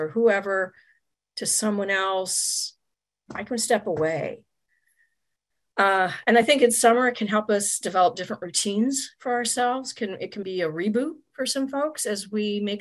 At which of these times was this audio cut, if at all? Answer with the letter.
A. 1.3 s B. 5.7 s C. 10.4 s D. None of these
C